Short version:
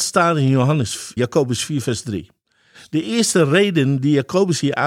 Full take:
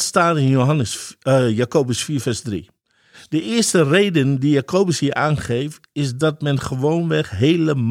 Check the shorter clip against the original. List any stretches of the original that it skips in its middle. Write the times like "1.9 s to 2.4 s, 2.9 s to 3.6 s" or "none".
1.2 s to 1.6 s

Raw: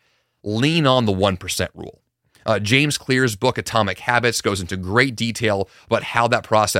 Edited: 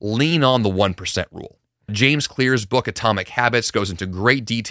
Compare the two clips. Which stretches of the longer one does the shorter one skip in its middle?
2.3 s to 2.6 s

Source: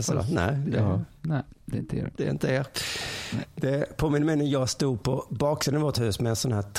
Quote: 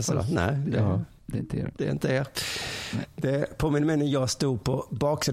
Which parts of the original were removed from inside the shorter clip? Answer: 1.2 s to 1.6 s

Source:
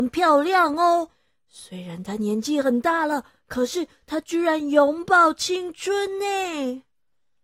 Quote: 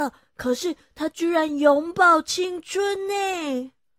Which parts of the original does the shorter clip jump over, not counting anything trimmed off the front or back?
none

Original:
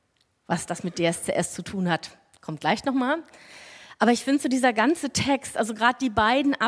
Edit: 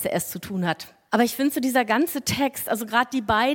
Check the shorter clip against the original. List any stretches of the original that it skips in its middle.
2.3 s to 4.0 s

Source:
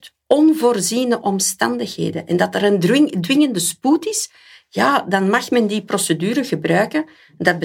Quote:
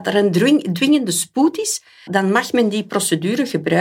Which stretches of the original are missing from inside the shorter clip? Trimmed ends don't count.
4.5 s to 5.0 s

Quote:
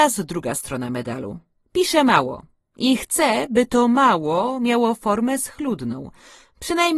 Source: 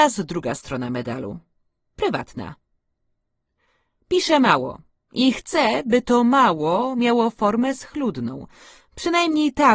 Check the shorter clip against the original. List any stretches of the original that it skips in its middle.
1.6 s to 4.0 s

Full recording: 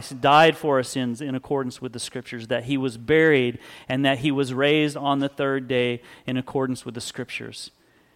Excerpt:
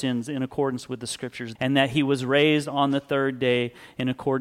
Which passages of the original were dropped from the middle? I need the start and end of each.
2.5 s to 3.8 s

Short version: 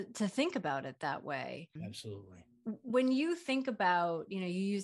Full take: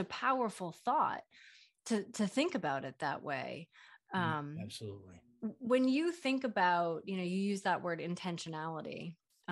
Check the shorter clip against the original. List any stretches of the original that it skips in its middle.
3.7 s to 4.5 s

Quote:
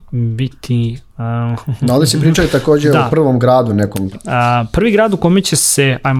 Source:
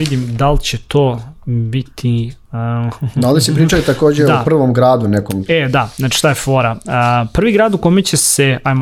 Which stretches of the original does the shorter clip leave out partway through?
5.5 s to 6.7 s

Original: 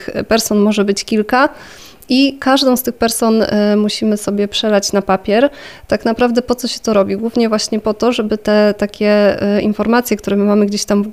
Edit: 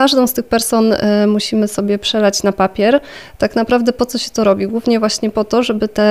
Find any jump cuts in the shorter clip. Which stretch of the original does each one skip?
none

